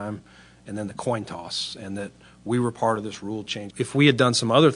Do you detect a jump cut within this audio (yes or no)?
yes